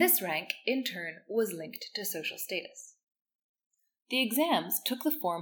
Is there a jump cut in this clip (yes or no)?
yes